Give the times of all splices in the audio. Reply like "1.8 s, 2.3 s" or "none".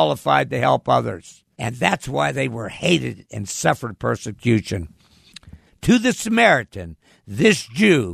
1.6 s, 5.7 s